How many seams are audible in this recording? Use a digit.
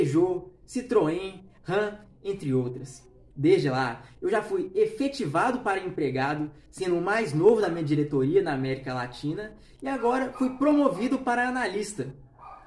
1